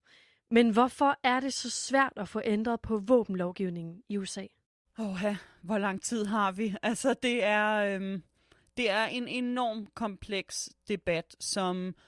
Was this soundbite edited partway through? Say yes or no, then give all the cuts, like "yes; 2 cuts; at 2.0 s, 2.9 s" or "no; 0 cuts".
no; 0 cuts